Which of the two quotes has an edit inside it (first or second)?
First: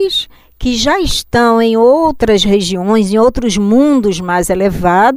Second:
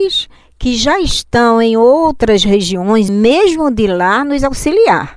second